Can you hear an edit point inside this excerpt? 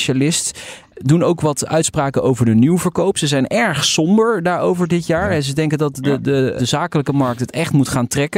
yes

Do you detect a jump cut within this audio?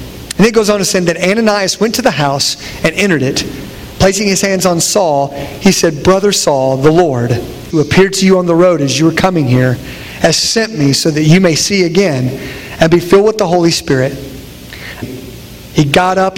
yes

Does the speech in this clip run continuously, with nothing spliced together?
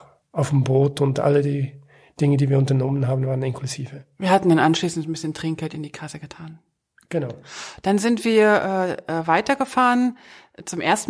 yes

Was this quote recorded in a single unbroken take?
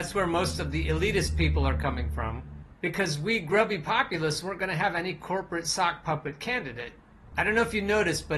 no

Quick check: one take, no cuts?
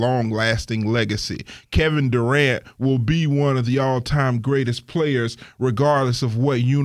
yes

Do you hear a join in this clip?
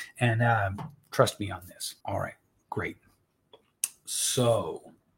yes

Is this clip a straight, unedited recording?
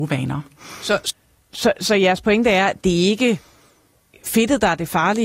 no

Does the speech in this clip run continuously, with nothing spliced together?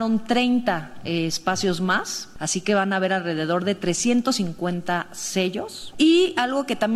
no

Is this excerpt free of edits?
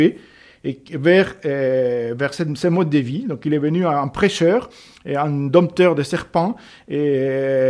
yes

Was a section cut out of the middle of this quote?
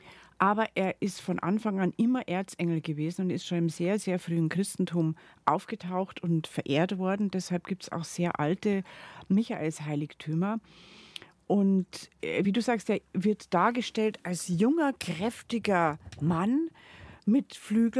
no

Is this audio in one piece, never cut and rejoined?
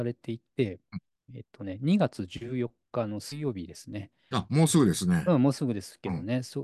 yes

